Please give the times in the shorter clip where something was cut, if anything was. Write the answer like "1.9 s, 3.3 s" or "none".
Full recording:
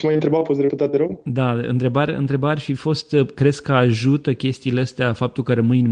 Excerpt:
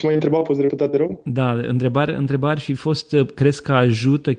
none

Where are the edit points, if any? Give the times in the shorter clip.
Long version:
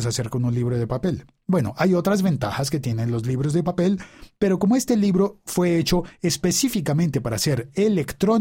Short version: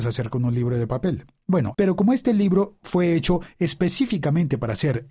1.7 s

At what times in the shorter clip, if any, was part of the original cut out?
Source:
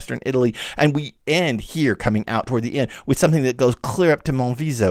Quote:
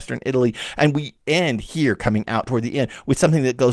none

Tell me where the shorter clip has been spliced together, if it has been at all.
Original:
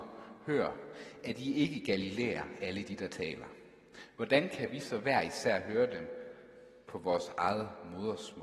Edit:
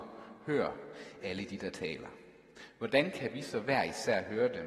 1.2 s

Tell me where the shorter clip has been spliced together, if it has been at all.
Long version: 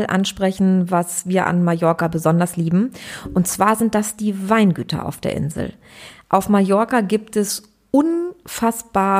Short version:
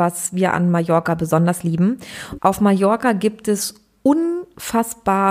2.4 s

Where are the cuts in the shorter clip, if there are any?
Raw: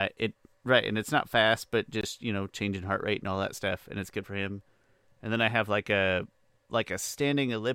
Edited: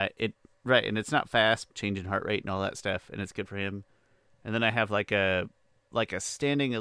1.7 s

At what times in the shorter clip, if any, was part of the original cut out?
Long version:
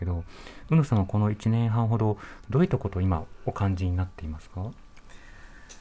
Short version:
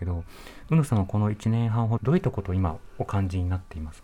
2.0 s

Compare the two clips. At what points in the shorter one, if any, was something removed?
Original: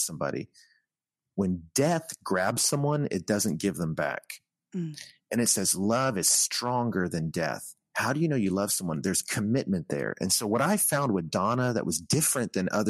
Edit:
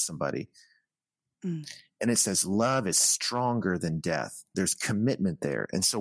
1.3 s, 4.5 s

